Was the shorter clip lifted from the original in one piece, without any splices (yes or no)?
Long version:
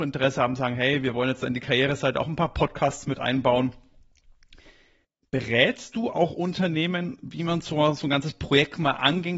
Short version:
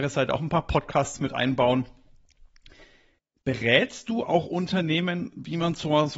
yes